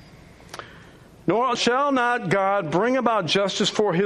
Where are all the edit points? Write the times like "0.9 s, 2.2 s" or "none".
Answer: 1.6 s

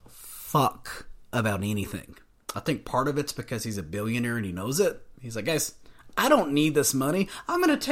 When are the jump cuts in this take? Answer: 5.1 s

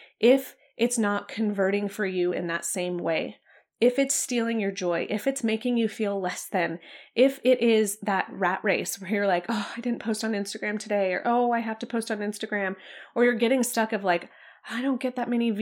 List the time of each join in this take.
none

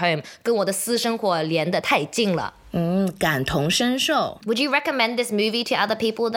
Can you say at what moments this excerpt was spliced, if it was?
4.4 s

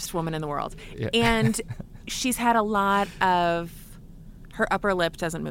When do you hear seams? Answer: none

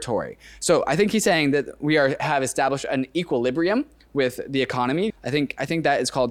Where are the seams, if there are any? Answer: 5.1 s

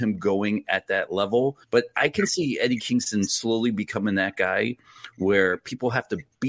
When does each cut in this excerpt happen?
1.6 s

